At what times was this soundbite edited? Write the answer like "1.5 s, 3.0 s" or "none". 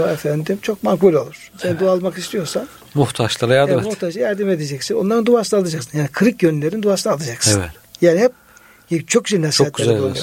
none